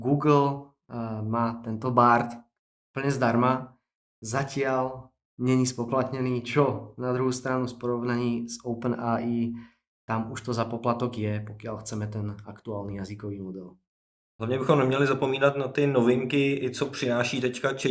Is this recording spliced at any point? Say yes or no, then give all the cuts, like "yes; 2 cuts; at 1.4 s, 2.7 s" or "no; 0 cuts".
no; 0 cuts